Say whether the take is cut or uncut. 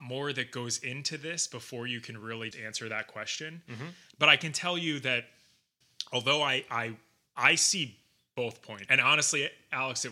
cut